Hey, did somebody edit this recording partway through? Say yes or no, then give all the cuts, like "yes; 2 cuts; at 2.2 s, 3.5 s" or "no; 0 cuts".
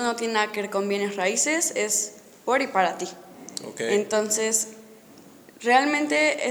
no; 0 cuts